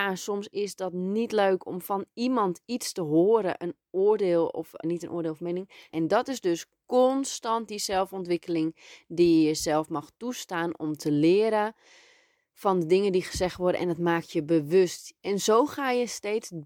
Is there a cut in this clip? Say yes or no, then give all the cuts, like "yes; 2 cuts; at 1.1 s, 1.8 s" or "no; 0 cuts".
yes; 3 cuts; at 4.8 s, 5.9 s, 15.2 s